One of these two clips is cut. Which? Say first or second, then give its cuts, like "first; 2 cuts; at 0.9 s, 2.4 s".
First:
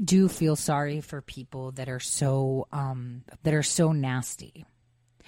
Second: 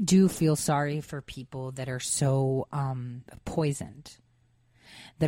first; 1 cut; at 3.4 s